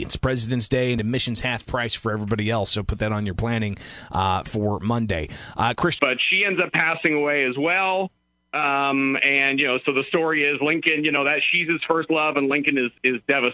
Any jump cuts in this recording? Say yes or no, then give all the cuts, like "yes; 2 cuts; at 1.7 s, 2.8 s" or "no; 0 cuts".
yes; 1 cut; at 6.0 s